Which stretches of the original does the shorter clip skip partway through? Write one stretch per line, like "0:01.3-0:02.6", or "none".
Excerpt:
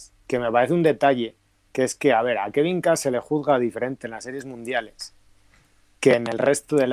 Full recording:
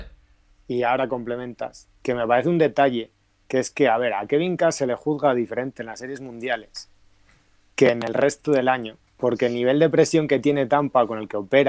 none

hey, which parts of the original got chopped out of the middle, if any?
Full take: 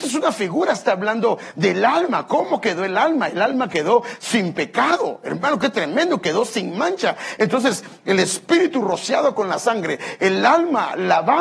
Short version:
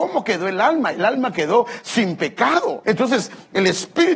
0:05.2-0:07.4

